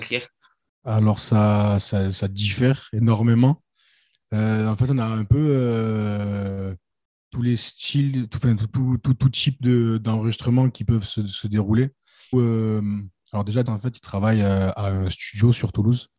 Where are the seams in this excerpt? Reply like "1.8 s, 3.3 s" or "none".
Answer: 12.3 s, 13.7 s